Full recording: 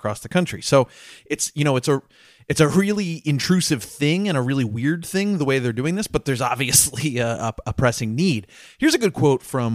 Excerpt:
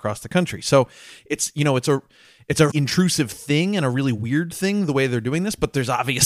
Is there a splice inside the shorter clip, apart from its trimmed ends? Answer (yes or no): yes